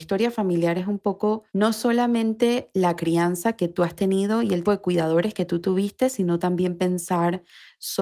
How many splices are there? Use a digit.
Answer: 2